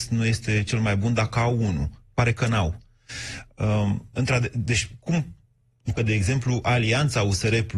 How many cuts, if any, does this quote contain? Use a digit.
2